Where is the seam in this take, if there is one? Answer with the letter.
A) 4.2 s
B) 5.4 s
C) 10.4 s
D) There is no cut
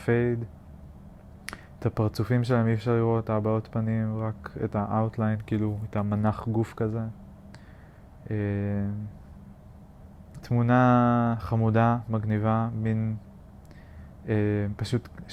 C